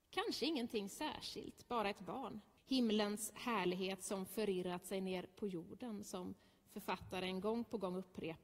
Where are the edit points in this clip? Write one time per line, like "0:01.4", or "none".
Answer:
0:02.6